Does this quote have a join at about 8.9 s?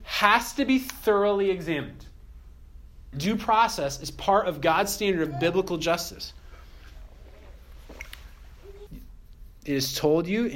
yes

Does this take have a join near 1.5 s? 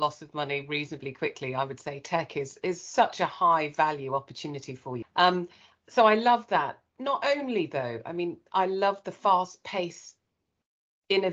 no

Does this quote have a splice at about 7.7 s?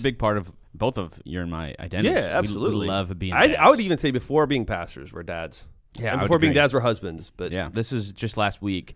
yes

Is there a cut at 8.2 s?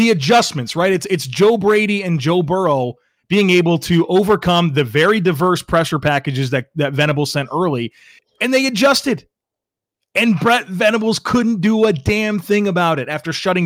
yes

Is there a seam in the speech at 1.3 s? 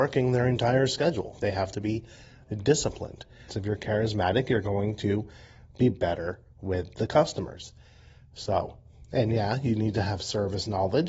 no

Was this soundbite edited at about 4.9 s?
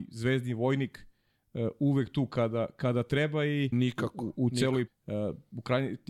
yes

